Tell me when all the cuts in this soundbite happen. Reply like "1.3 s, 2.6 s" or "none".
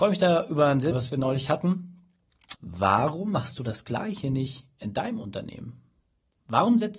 0.9 s, 2.5 s